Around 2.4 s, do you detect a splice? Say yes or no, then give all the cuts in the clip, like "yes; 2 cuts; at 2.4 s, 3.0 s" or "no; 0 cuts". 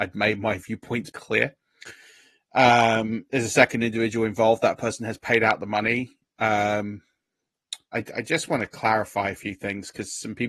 no; 2 cuts; at 1.1 s, 7.8 s